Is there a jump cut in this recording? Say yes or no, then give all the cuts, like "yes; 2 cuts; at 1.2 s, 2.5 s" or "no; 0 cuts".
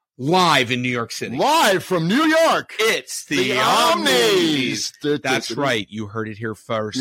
no; 0 cuts